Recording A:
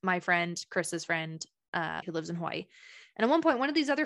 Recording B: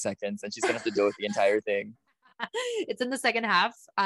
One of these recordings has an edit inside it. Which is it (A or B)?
A